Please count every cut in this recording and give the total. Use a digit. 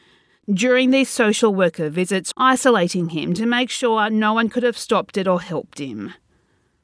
1